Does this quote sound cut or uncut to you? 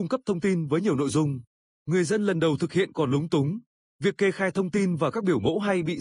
cut